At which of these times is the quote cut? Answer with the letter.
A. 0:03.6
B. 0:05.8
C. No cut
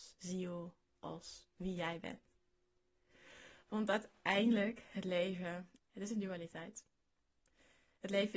B